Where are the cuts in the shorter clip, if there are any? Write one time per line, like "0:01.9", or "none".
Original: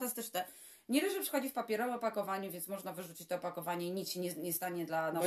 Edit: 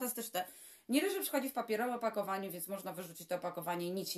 none